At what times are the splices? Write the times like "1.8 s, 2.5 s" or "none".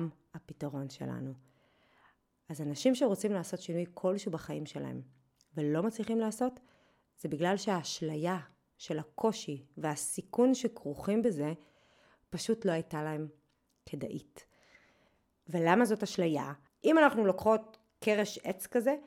16.7 s